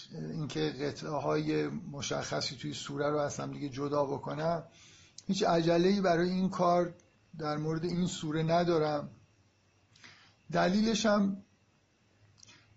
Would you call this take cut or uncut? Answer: uncut